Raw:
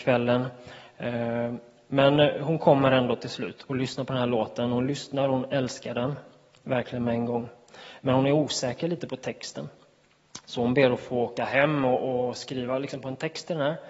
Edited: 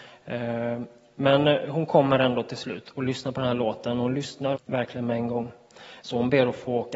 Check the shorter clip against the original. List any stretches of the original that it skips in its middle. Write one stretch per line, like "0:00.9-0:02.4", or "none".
0:05.3-0:06.5
0:08.0-0:10.5

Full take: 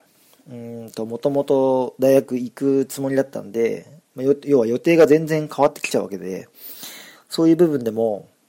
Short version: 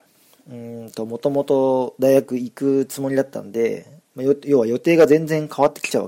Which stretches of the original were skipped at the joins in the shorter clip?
none

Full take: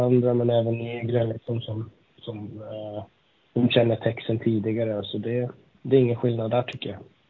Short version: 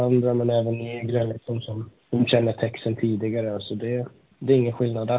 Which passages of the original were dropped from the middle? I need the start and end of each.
0:02.0-0:03.4

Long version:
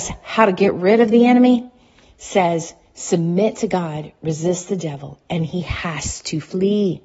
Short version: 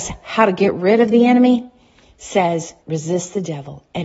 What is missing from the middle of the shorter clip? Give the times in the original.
0:02.8-0:04.2

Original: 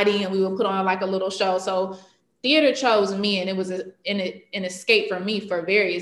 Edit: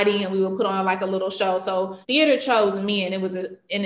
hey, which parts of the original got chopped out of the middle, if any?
0:02.0-0:02.4

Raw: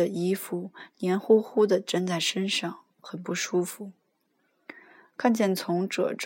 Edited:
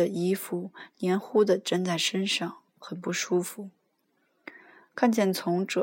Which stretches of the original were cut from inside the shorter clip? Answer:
0:01.2-0:01.4

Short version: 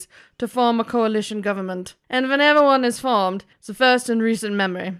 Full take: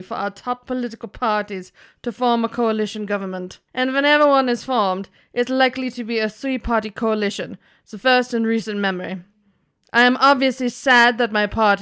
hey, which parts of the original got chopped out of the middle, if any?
0:05.2-0:07.8

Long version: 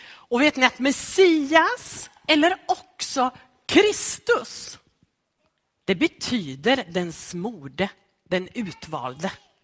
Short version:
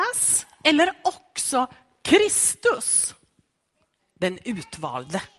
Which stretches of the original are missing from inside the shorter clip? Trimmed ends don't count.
0:05.6-0:08.1

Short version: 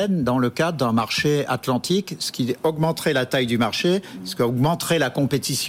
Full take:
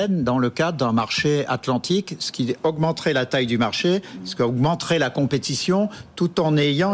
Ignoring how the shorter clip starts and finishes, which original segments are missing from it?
none

